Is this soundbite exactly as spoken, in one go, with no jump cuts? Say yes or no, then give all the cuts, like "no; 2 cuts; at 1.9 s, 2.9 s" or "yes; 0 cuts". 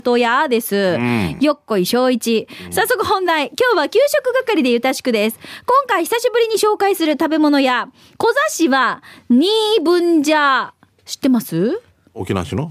yes; 0 cuts